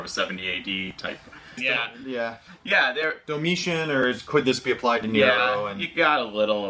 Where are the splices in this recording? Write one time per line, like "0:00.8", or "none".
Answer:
0:01.6